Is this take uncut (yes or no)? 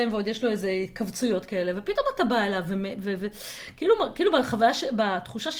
yes